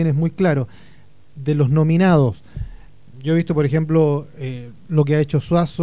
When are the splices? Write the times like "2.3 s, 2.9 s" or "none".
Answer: none